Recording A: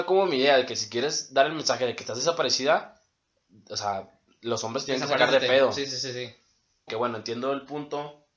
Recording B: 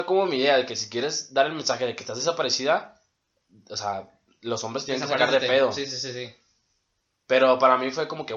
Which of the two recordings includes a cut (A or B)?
A